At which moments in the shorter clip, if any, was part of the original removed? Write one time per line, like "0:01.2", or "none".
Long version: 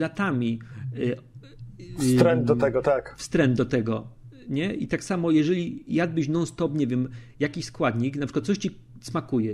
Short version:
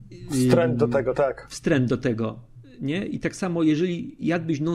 none